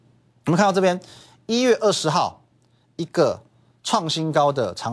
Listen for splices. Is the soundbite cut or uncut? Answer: uncut